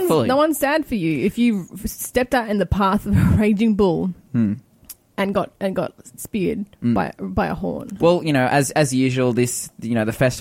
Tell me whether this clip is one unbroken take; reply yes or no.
no